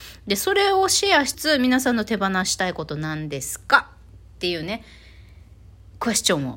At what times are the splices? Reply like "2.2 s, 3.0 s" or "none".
1.3 s